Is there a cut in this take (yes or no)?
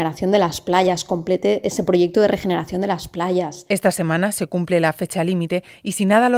yes